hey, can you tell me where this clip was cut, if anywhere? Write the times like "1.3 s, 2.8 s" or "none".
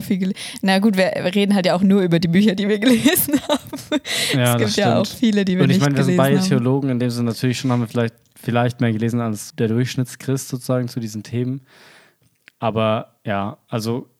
9.5 s